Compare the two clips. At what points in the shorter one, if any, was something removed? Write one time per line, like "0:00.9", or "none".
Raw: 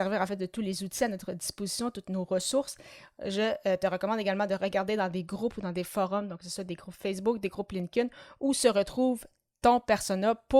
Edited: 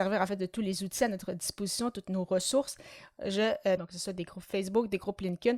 0:03.8

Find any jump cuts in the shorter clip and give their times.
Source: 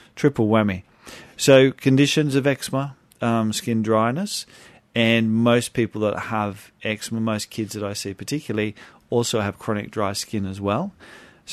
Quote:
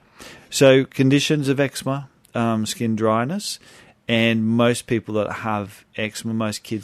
none

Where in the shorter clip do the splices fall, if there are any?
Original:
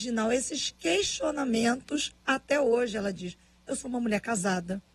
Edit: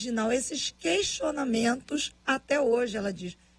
none

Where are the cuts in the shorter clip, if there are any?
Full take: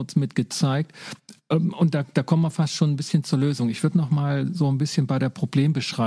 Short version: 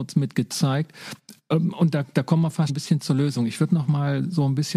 0:02.7

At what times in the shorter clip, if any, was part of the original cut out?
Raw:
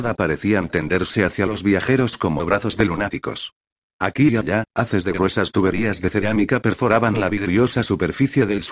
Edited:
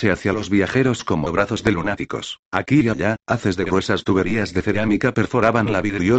0:02.4

